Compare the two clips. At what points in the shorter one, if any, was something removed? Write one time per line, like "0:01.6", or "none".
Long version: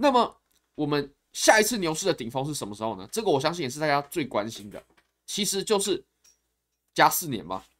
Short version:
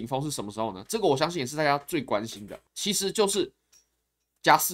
0:02.7

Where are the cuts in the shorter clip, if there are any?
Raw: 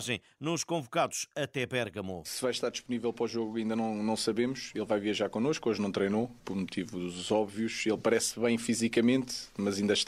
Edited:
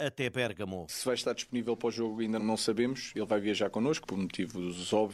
0:02.4
0:04.0

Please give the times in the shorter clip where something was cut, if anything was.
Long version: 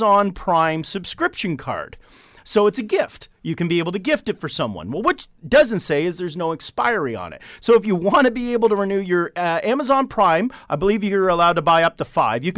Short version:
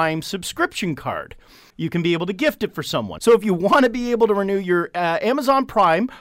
0:01.7
0:03.2

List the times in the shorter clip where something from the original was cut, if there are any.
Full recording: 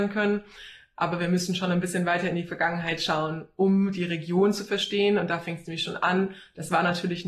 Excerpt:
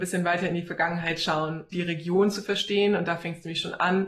0:01.7

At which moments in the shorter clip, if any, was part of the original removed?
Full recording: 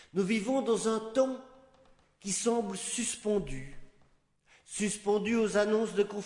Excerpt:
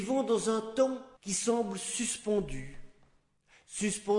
0:01.2

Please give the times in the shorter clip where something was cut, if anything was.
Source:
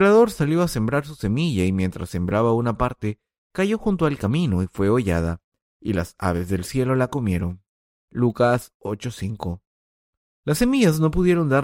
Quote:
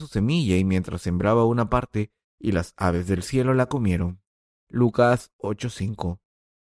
0:02.2

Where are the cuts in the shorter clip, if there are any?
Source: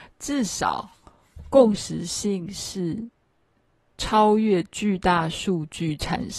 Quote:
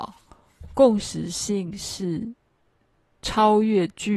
none

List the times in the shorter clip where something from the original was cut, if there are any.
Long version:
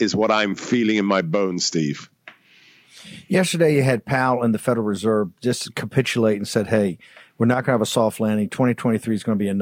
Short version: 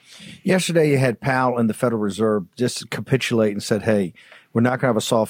none

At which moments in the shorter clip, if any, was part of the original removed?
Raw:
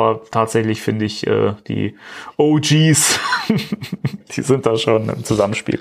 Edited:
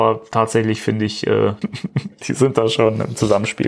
0:01.6

